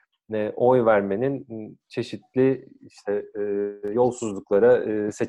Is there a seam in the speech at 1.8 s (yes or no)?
yes